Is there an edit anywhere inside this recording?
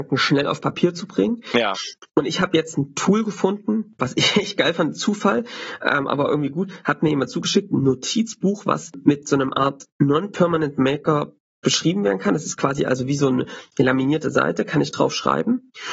yes; 1 cut; at 4.0 s

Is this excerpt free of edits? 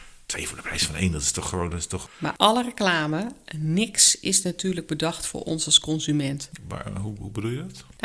yes; 0 cuts

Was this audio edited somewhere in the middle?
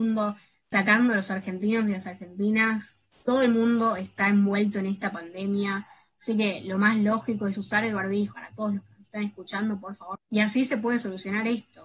yes; 2 cuts; at 8.3 s, 10.1 s

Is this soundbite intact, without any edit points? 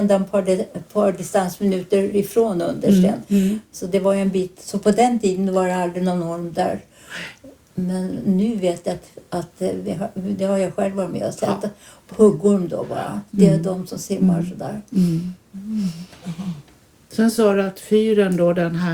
yes; 0 cuts

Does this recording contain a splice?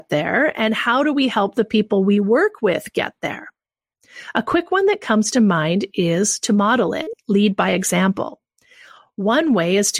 no; 0 cuts

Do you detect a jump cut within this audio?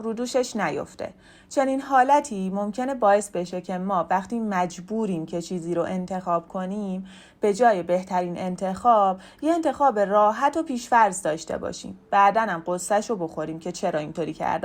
no; 0 cuts

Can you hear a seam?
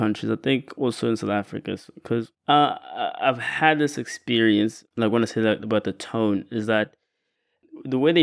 yes; 1 cut; at 4.9 s

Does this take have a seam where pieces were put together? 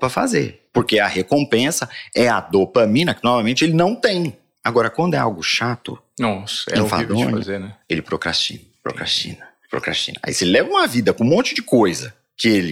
no; 0 cuts

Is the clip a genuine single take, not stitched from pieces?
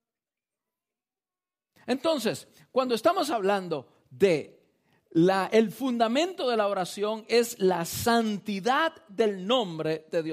yes; 0 cuts

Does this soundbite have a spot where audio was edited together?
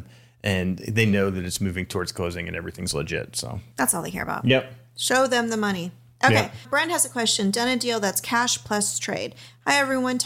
no; 0 cuts

